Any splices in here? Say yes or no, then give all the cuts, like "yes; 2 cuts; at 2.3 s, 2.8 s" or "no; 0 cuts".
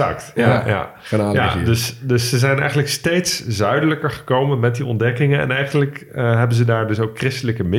no; 0 cuts